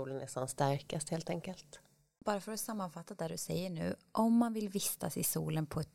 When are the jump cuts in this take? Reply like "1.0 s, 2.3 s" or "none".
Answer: none